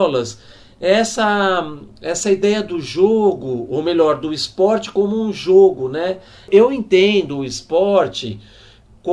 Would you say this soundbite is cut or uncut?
cut